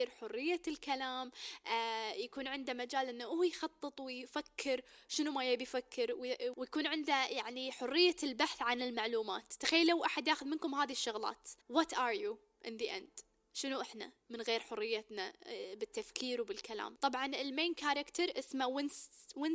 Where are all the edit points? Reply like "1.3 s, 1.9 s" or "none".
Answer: 11.6 s